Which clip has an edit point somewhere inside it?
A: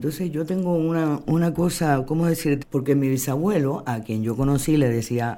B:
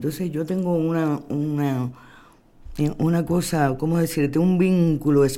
A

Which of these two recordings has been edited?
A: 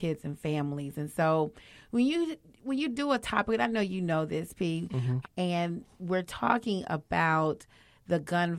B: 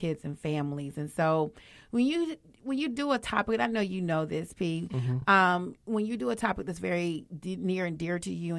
A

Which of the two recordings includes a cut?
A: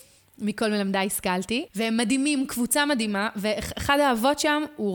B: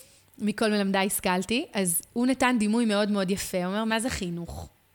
A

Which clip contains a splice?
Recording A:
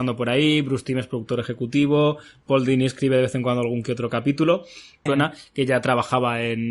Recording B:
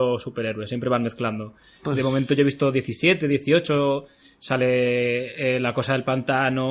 A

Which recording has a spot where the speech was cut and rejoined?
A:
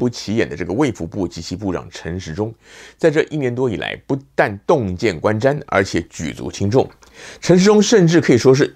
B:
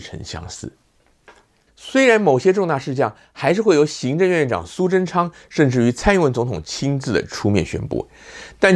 B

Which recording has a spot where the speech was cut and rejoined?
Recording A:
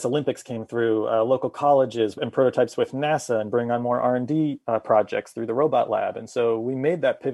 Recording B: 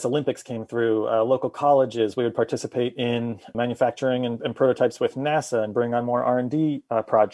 A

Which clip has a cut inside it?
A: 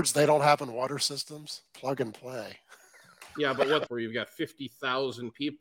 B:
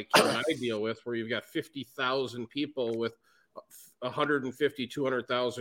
A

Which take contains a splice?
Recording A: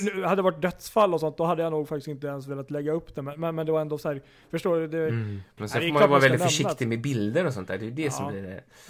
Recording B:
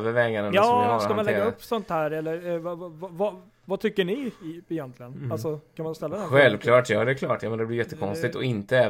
A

